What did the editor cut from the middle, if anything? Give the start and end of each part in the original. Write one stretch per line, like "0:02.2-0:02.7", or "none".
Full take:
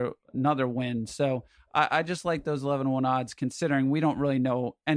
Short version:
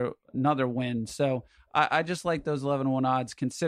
none